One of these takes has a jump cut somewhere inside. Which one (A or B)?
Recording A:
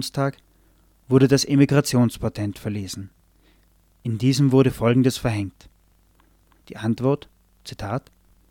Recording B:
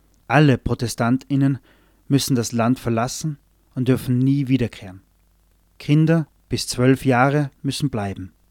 A